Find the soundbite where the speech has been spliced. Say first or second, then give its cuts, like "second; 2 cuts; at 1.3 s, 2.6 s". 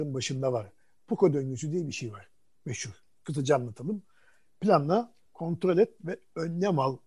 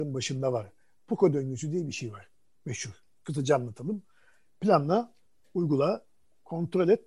first; 1 cut; at 5.3 s